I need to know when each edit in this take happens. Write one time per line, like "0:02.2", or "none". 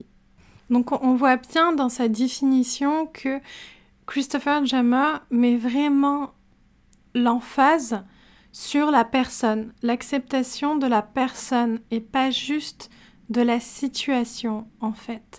none